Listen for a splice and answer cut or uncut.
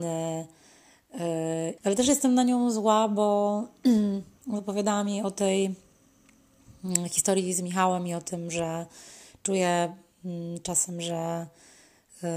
cut